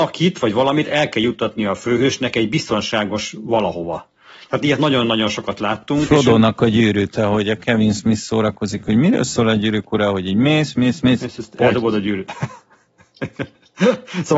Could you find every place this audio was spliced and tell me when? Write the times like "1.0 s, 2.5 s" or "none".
none